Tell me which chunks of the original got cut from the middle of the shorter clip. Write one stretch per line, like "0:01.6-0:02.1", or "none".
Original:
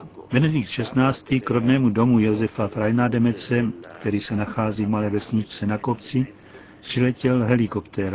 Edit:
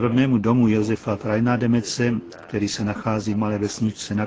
none

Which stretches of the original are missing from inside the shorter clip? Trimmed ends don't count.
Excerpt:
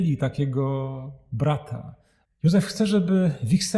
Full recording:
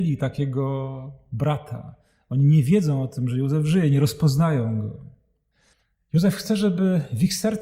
0:02.3-0:05.9

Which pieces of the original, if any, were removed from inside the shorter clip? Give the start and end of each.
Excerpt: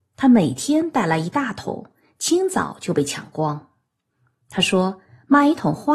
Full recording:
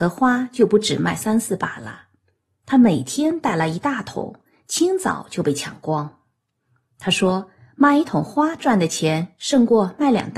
none

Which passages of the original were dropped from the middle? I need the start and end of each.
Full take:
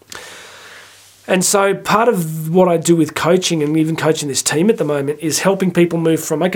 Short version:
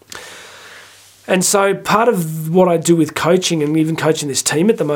none

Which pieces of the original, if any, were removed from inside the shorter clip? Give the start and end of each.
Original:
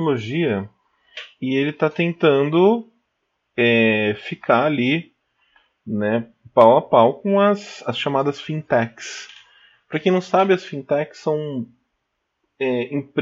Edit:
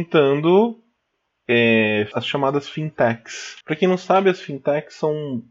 0:04.2-0:07.8
0:09.3-0:09.8

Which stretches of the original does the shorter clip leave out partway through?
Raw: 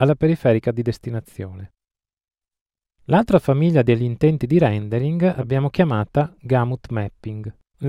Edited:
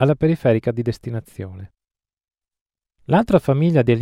none

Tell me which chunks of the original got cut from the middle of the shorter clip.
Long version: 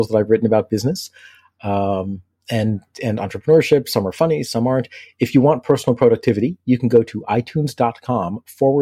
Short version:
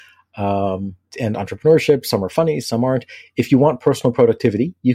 0:02.4-0:02.9

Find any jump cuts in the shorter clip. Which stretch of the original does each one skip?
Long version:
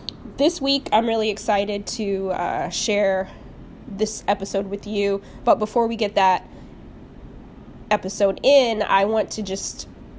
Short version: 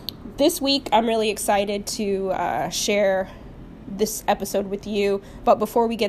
none

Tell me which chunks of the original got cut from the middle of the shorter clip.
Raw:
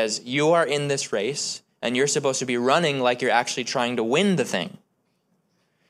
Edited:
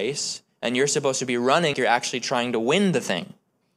0:02.9-0:03.2

